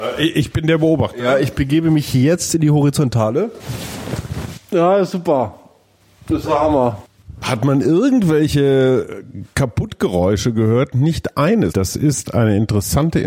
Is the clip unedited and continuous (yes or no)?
no